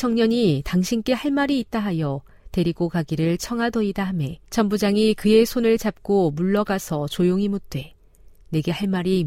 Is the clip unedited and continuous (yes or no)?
no